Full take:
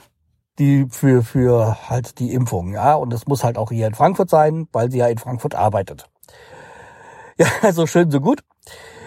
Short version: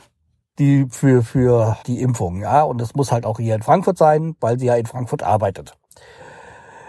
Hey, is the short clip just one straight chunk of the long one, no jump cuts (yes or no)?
no